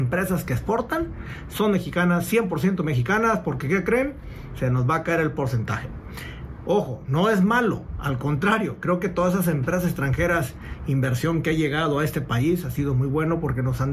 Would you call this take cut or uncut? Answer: uncut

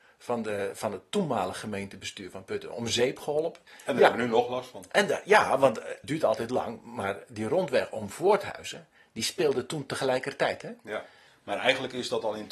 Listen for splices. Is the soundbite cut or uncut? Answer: uncut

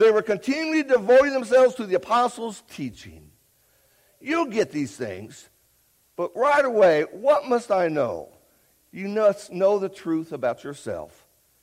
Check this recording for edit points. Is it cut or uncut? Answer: uncut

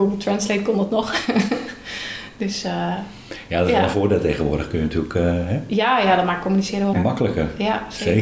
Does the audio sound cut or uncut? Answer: cut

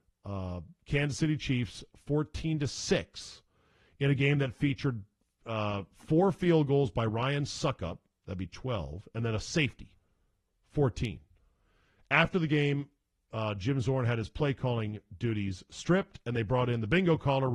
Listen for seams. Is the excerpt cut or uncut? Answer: uncut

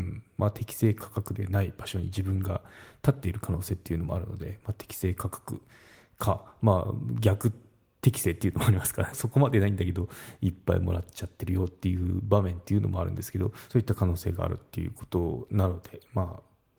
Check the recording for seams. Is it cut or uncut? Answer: cut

